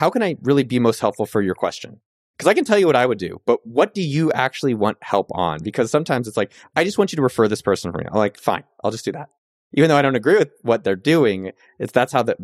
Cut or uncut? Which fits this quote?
uncut